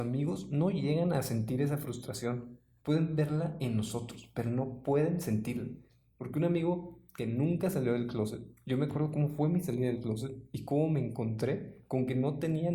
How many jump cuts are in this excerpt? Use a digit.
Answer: 0